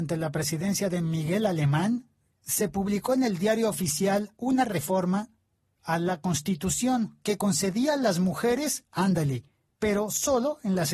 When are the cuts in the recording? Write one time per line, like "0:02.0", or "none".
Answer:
0:02.3
0:09.7